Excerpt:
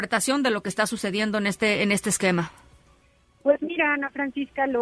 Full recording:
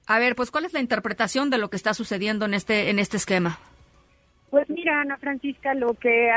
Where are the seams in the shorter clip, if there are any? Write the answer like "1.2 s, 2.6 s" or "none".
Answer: none